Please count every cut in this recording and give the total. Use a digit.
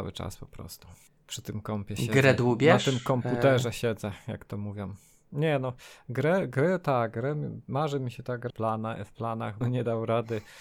2